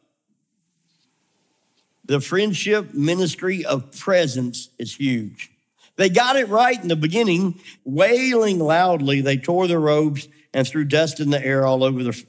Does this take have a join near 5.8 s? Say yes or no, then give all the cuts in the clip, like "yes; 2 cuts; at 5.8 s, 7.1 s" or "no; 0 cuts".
no; 1 cut; at 7.8 s